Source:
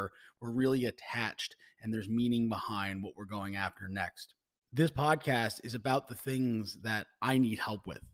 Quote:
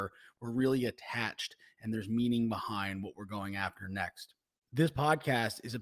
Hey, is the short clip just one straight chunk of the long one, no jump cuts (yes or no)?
yes